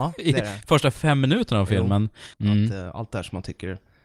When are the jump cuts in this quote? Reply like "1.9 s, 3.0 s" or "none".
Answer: 2.3 s